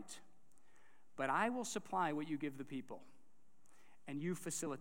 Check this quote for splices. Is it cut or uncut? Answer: uncut